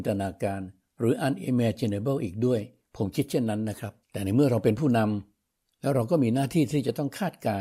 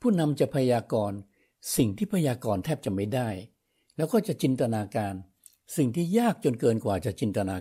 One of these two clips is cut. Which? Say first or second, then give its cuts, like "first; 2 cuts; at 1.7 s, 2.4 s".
first; 1 cut; at 4.0 s